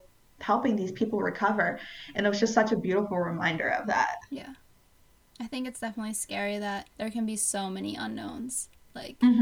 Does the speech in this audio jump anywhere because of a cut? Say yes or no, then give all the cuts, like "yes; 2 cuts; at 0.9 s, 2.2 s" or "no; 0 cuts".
yes; 2 cuts; at 2.1 s, 6.9 s